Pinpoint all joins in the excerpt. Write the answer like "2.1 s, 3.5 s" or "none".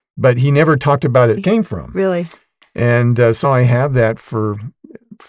1.4 s, 3.4 s

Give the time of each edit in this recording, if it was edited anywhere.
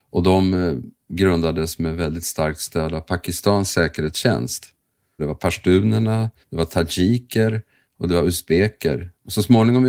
5.2 s, 6.4 s

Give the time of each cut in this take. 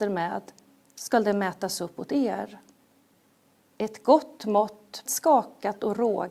3.7 s, 5.1 s

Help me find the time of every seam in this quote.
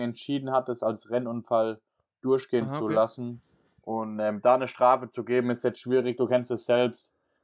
none

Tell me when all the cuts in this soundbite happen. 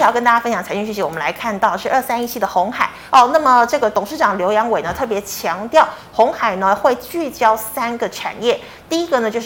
3.1 s

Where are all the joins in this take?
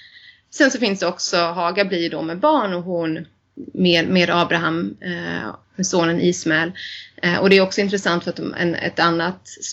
none

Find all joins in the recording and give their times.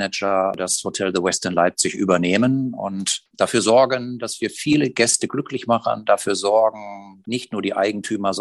7.2 s

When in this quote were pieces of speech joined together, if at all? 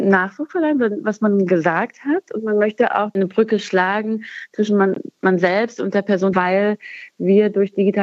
6.3 s

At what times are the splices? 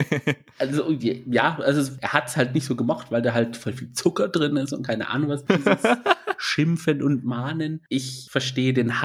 5.5 s, 7.9 s

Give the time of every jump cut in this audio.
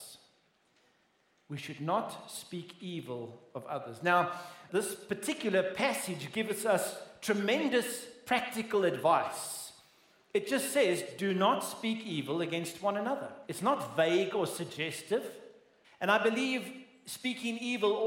4.7 s, 15.8 s

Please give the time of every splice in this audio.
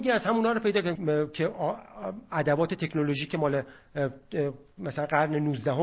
1.0 s

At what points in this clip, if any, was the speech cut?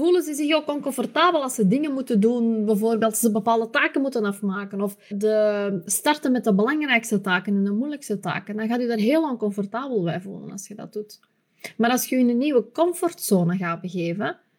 5.1 s

